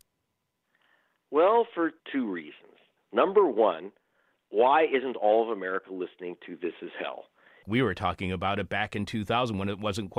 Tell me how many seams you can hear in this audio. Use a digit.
2